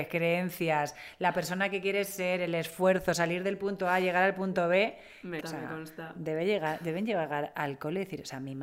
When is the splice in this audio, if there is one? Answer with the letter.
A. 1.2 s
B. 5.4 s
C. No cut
B